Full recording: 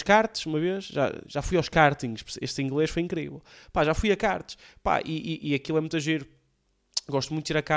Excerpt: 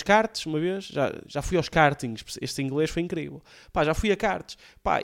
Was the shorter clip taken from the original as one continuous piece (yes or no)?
yes